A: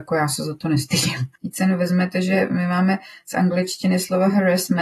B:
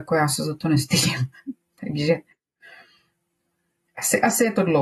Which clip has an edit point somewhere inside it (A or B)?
A